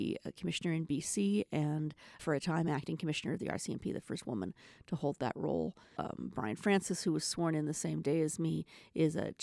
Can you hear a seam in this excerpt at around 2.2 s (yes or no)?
yes